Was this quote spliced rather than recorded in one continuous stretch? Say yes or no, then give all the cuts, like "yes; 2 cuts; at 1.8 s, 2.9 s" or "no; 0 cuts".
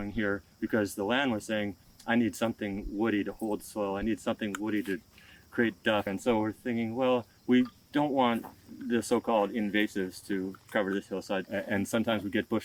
yes; 2 cuts; at 6.1 s, 11.4 s